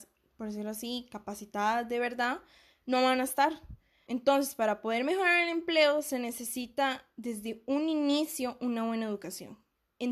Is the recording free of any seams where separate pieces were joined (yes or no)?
no